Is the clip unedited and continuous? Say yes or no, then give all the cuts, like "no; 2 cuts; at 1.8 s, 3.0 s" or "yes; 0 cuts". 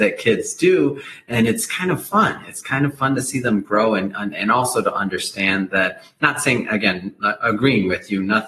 yes; 0 cuts